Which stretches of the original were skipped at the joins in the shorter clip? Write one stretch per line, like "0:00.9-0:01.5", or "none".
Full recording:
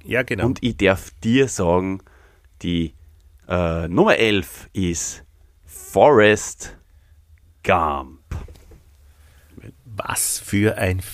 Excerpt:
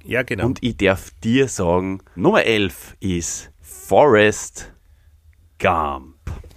0:02.2-0:03.9
0:05.3-0:05.6